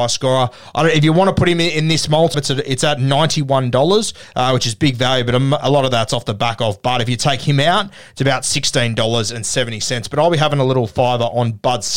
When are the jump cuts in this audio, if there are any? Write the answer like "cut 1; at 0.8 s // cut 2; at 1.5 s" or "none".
cut 1; at 2.3 s